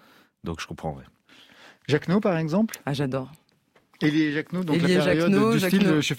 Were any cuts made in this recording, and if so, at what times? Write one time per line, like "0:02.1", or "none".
none